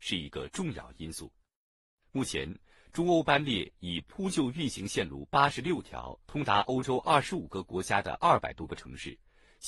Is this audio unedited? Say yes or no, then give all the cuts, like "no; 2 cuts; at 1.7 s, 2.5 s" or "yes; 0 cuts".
no; 2 cuts; at 1.9 s, 6.2 s